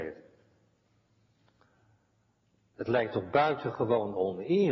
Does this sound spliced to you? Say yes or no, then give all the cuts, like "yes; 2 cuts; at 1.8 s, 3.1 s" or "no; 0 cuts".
no; 0 cuts